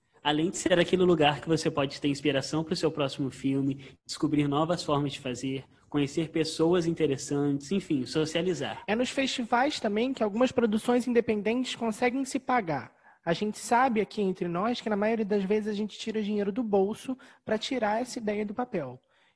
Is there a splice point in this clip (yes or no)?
no